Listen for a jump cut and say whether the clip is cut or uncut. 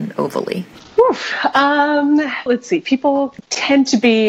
cut